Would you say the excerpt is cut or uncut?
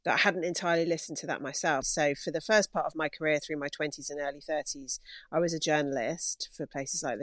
cut